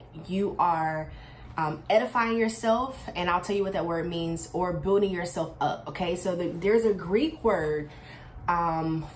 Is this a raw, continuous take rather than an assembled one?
yes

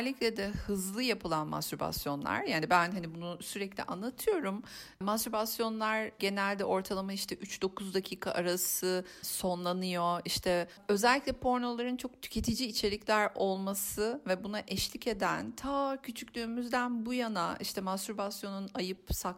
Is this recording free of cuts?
yes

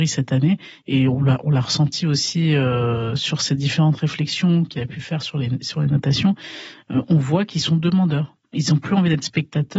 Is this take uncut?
no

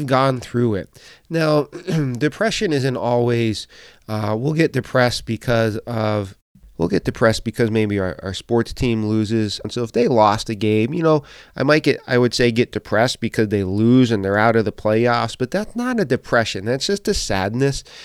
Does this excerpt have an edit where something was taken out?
yes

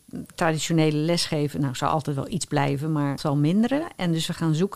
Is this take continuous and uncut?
no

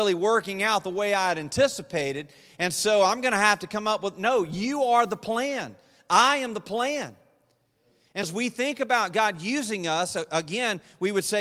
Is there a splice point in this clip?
yes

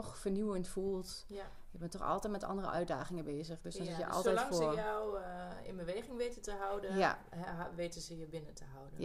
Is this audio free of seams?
yes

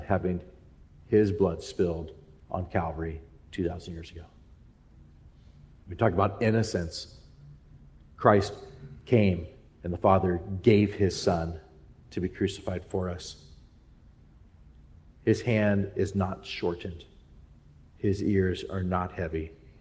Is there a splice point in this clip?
no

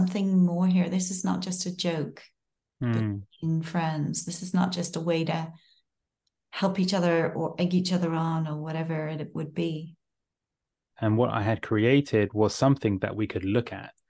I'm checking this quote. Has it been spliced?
yes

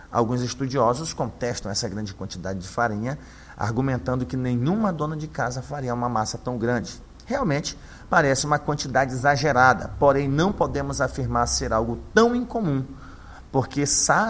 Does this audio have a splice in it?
no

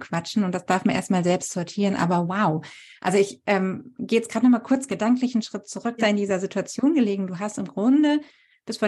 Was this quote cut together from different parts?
yes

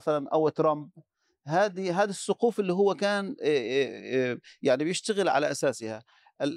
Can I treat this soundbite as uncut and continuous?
yes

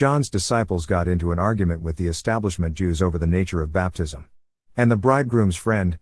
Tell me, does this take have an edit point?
yes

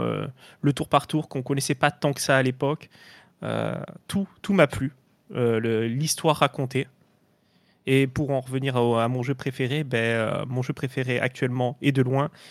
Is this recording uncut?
yes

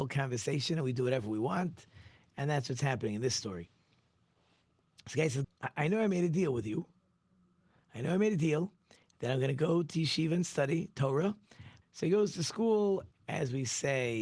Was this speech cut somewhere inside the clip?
yes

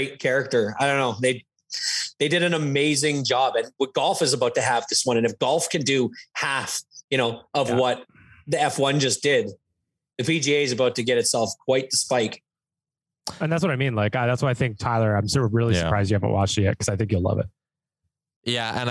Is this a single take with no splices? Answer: yes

